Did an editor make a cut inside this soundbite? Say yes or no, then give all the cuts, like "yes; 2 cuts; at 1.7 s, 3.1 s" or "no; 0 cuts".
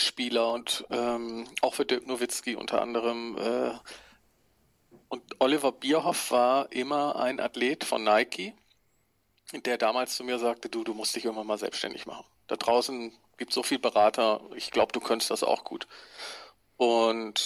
no; 0 cuts